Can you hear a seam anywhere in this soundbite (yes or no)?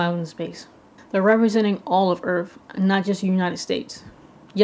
yes